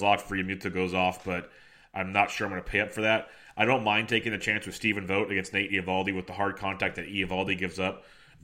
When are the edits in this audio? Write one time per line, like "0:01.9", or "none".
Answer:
none